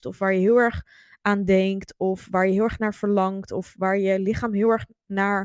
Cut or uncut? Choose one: uncut